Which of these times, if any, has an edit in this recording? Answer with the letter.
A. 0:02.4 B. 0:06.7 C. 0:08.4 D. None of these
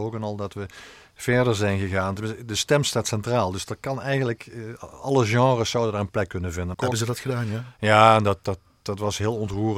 B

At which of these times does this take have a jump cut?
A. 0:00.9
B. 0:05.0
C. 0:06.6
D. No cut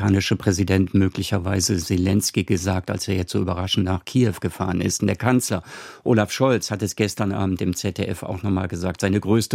B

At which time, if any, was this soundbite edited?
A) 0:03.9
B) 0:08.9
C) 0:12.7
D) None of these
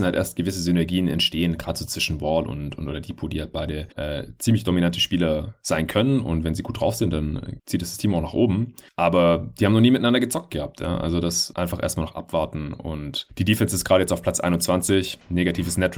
A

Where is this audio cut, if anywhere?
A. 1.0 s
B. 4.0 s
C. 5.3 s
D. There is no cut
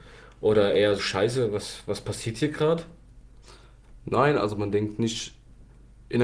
A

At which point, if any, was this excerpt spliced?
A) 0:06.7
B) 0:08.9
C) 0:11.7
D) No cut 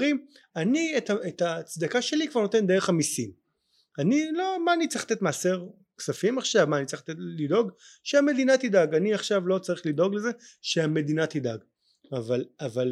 D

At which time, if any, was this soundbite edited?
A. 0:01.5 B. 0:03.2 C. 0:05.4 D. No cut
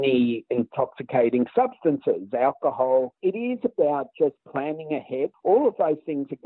B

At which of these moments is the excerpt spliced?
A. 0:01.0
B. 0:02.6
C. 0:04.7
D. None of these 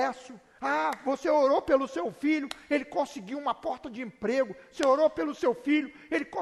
D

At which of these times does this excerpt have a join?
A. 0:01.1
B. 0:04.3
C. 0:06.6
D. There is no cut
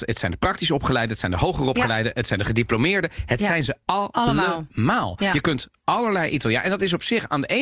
D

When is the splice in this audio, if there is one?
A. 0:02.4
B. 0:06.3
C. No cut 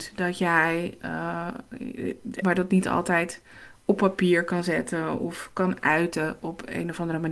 A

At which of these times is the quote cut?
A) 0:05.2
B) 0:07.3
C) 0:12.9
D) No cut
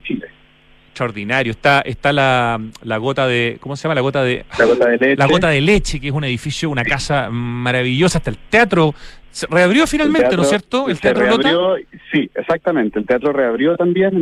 D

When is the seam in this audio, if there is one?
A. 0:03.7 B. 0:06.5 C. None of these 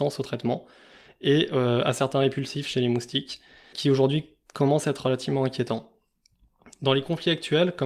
A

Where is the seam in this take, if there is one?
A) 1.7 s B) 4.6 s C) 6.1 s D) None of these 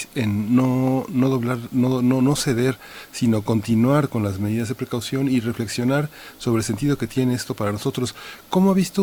D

